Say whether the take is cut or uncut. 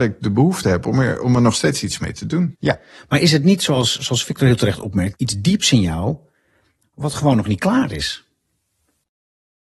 cut